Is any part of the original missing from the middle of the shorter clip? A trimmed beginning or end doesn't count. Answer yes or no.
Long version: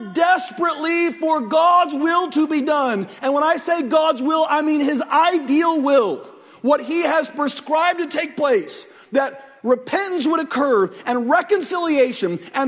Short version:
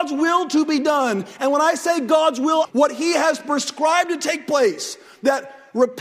yes